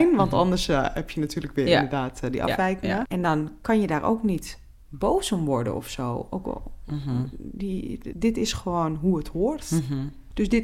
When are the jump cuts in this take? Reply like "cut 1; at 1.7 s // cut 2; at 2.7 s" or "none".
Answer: cut 1; at 3.1 s // cut 2; at 8.1 s